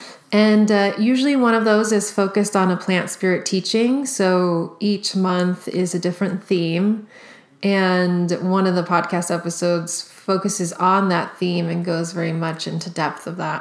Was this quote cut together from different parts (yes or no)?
no